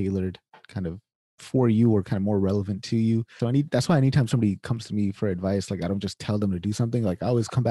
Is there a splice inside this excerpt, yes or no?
yes